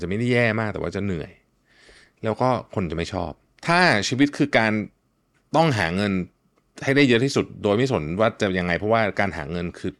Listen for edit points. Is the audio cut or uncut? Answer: uncut